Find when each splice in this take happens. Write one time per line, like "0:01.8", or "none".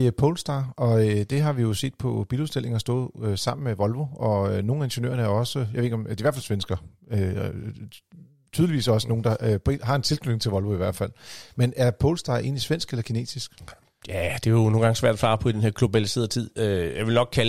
none